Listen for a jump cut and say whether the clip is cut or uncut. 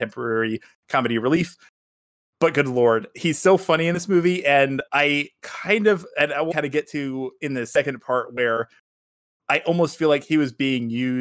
cut